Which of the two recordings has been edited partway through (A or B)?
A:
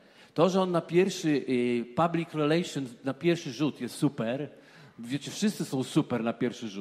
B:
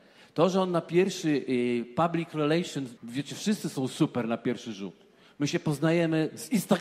B